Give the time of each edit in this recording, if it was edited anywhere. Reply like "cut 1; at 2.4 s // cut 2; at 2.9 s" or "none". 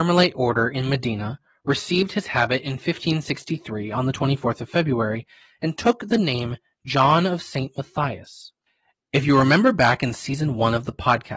none